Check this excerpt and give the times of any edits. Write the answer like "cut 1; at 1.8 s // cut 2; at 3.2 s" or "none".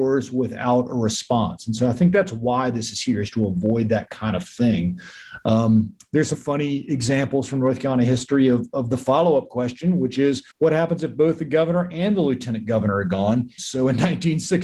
cut 1; at 6.3 s // cut 2; at 10.5 s // cut 3; at 13.6 s